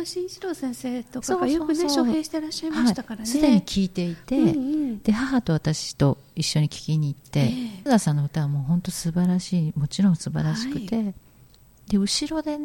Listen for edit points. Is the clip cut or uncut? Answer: cut